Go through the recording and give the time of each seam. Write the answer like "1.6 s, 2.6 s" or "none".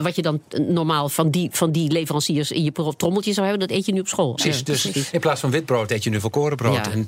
1.1 s, 4.4 s